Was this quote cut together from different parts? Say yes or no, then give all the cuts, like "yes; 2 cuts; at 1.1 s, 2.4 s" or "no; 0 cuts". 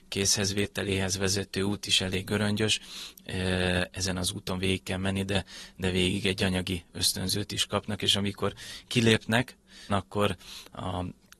yes; 1 cut; at 9.9 s